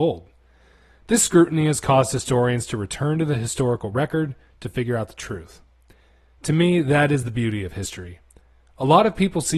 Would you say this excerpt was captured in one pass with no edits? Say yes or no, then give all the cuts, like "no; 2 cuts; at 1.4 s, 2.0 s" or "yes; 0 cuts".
yes; 0 cuts